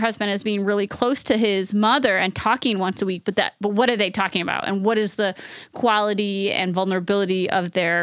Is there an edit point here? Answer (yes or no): no